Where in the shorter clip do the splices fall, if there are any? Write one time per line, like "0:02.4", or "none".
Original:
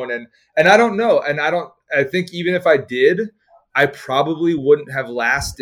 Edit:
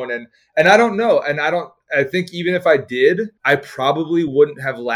0:03.4